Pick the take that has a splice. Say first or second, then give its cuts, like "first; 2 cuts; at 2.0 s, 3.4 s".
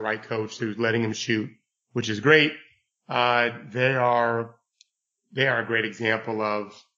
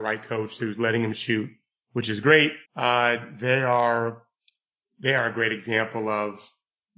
second; 1 cut; at 2.6 s